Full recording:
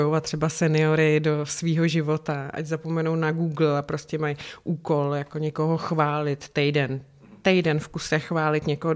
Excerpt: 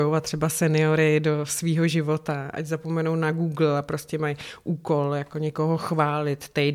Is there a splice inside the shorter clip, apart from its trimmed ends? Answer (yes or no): no